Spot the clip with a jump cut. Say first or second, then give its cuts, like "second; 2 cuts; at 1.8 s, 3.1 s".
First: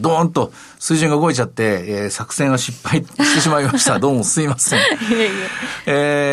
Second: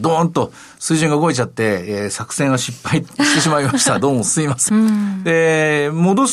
second; 1 cut; at 4.7 s